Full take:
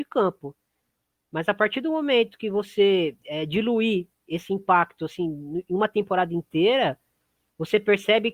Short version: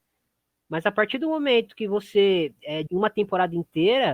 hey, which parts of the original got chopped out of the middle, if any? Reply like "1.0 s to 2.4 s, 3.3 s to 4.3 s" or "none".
3.5 s to 5.6 s